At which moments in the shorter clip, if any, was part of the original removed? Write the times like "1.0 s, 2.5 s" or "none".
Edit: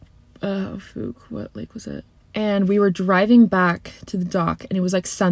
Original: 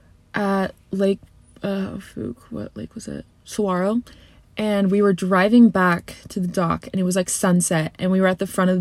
2.2 s